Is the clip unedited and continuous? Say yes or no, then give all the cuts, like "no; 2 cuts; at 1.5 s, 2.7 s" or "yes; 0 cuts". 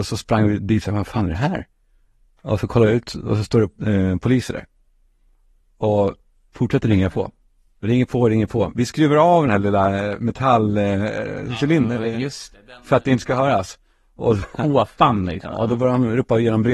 yes; 0 cuts